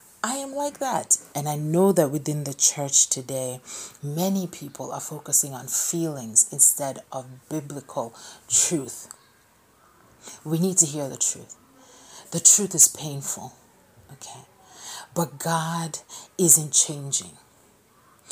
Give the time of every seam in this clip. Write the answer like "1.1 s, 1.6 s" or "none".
1.3 s